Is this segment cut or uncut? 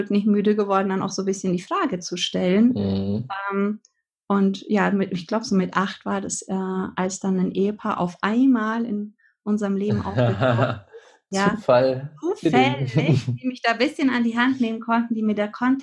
uncut